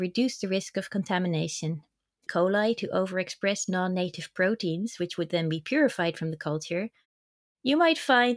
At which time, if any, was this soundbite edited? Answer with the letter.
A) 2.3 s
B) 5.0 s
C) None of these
A